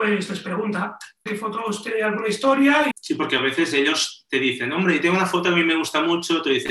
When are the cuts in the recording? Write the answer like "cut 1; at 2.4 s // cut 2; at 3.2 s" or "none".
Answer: cut 1; at 1.3 s // cut 2; at 2.9 s